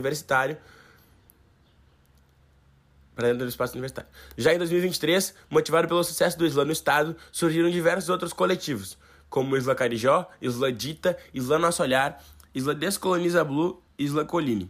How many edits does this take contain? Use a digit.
0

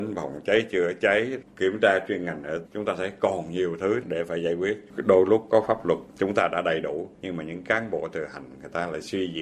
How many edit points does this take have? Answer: 1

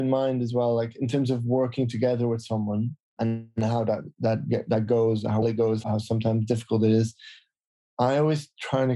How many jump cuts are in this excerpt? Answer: 1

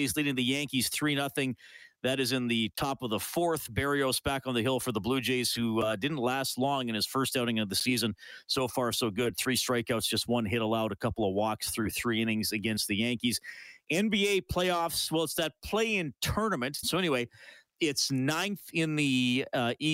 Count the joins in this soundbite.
1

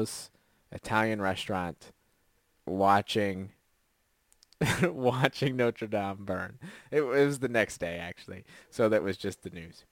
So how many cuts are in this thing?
0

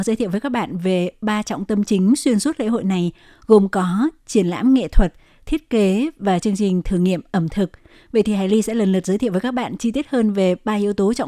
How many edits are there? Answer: 0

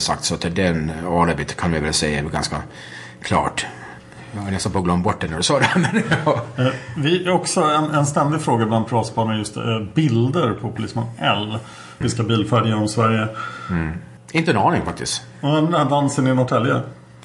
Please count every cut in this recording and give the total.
2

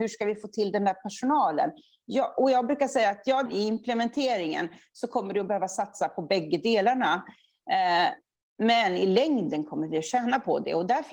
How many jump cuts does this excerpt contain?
1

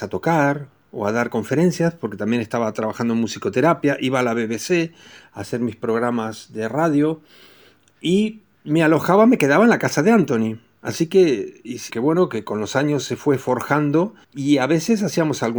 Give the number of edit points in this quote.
2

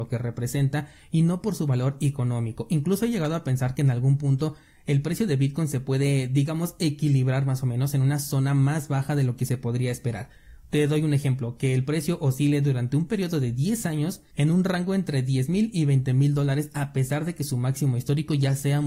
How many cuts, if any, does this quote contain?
0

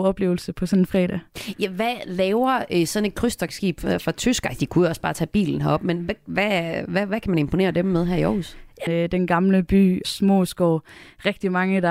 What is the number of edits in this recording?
2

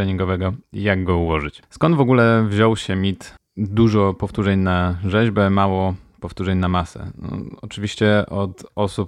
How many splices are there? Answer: 1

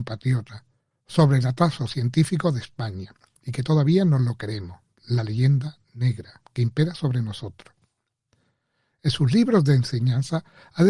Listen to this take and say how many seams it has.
0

